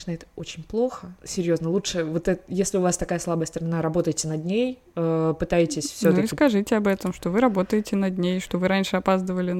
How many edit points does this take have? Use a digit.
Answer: 0